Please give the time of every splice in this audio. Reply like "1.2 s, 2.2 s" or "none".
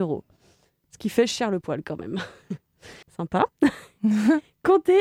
3.0 s